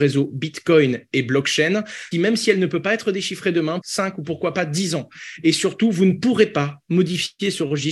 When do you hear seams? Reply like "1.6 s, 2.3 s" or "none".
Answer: 2.1 s, 3.8 s